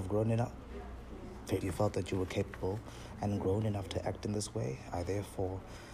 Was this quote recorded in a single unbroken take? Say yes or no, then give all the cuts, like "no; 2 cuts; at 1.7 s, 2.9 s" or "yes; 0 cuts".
no; 1 cut; at 1.6 s